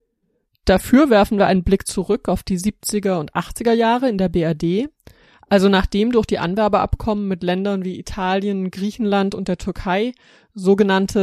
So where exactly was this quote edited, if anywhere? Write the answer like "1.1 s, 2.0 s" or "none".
none